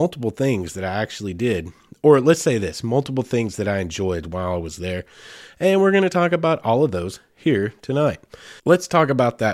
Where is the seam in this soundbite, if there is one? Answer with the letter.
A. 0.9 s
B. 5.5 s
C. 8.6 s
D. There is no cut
C